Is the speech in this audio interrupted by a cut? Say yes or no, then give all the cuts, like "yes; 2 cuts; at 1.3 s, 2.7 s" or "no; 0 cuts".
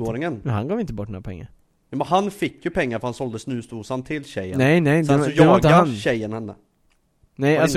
no; 0 cuts